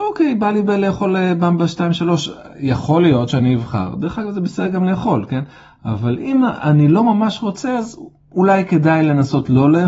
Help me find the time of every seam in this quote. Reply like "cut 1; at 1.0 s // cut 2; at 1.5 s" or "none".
none